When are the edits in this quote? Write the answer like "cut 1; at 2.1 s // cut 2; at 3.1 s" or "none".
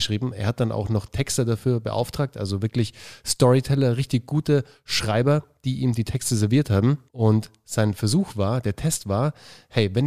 cut 1; at 7.1 s